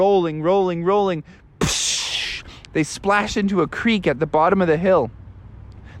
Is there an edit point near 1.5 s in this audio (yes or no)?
no